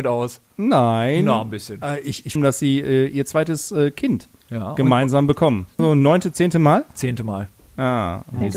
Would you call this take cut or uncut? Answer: cut